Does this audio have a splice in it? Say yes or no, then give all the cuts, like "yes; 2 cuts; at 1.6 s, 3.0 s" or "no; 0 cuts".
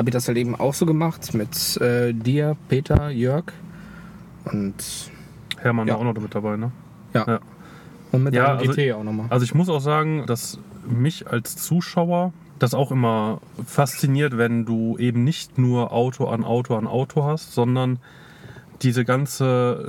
yes; 1 cut; at 7.1 s